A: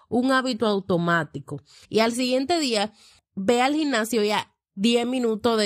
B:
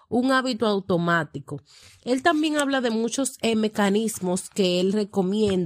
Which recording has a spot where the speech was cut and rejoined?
A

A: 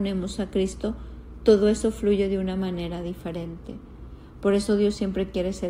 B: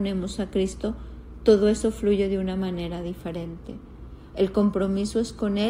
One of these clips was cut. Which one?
B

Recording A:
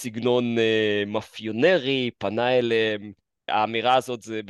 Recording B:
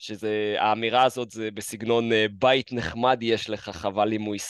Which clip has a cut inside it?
A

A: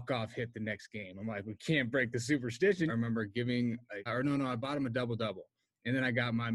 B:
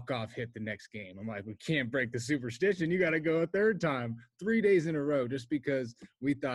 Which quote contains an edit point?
A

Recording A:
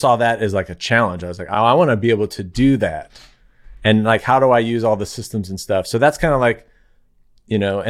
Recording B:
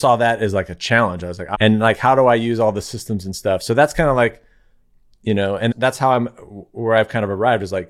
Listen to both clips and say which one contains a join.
B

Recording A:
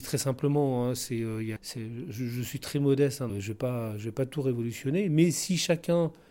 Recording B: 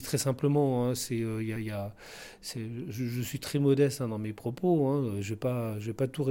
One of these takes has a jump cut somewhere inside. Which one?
A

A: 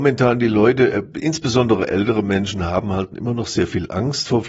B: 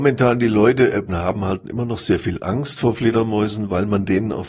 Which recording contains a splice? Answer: B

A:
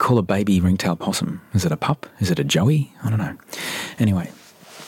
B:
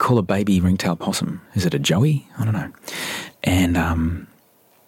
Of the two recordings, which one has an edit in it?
B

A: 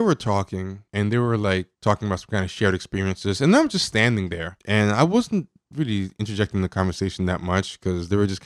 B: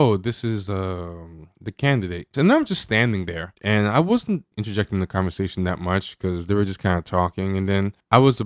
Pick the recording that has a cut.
B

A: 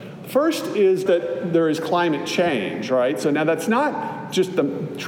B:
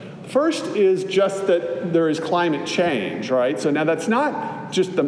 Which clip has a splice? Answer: A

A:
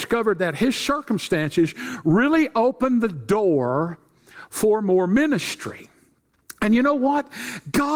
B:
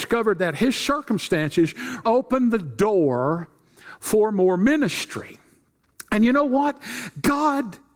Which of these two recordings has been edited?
B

